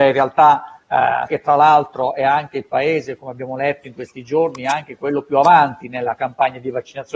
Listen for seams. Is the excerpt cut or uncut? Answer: cut